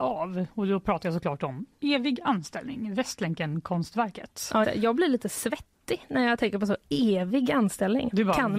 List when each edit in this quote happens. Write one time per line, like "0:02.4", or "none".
0:04.6

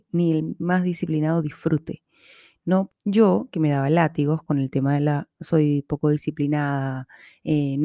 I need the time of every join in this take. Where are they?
0:02.9

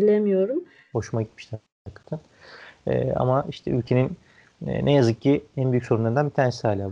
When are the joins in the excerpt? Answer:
0:00.9

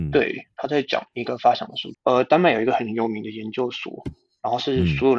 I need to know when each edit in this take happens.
0:01.9

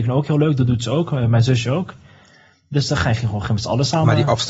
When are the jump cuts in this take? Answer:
none

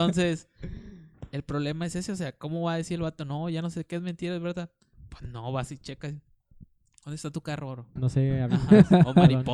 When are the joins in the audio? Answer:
0:08.0

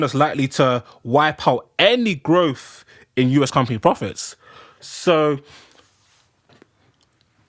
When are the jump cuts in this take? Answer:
none

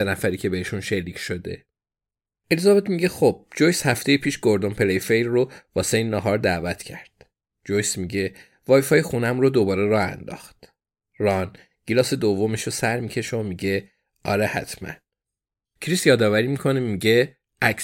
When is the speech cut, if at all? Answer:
none

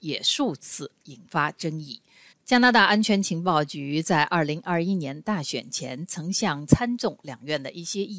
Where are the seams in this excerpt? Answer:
0:02.3

